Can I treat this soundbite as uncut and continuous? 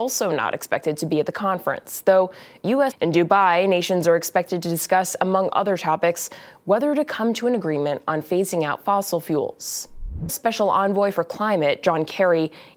no; 2 cuts; at 2.9 s, 10.3 s

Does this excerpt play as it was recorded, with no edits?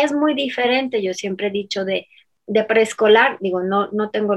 yes; 0 cuts

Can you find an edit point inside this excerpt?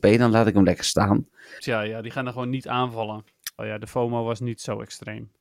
yes; 2 cuts; at 1.6 s, 3.6 s

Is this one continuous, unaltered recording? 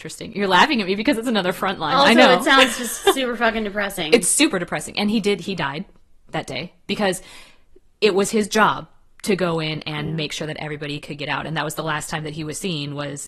yes; 0 cuts

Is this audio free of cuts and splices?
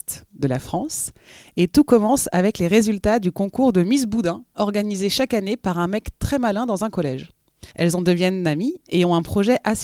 no; 1 cut; at 7.7 s

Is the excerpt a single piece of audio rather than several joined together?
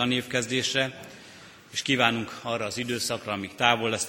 yes; 0 cuts

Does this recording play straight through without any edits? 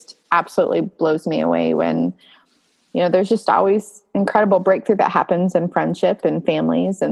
yes; 0 cuts

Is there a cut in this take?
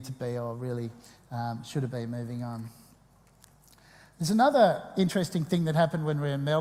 no; 0 cuts

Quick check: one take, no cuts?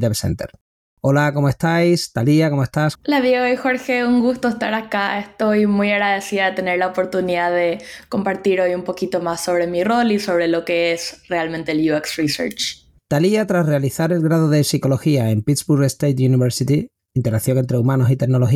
no; 3 cuts; at 2.9 s, 13.0 s, 17.1 s

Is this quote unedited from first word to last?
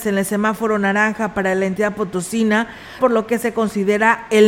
no; 1 cut; at 3.0 s

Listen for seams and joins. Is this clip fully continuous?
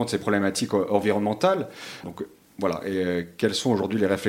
no; 1 cut; at 2.0 s

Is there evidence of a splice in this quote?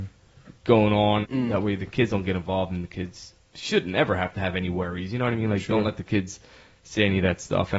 yes; 1 cut; at 1.2 s

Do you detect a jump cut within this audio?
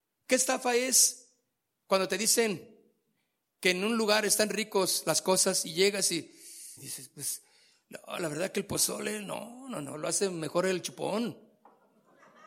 yes; 1 cut; at 6.8 s

